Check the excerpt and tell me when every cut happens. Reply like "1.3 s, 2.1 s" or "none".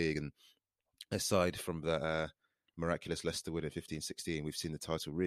none